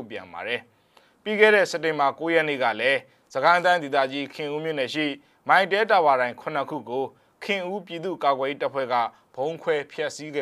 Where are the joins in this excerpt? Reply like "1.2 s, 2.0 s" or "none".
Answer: none